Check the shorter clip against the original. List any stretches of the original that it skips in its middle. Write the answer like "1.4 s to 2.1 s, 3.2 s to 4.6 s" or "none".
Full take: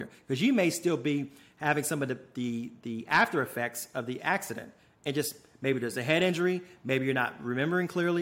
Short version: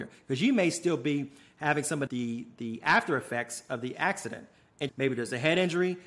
2.1 s to 2.3 s, 5.1 s to 5.5 s